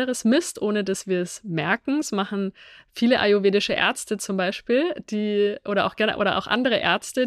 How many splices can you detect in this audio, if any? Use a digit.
0